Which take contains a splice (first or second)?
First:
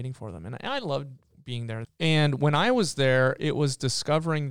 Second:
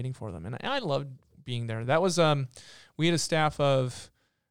first